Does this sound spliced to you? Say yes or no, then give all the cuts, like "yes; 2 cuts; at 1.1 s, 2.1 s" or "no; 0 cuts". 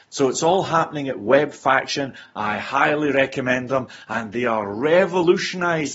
no; 0 cuts